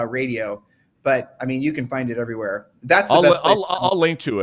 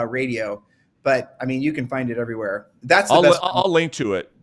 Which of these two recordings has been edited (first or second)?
second